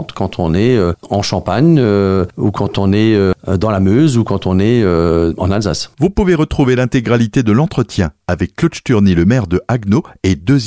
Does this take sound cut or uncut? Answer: uncut